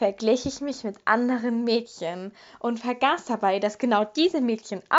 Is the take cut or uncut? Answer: uncut